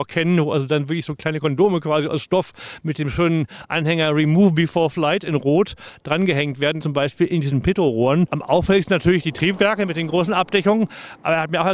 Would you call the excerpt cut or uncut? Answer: cut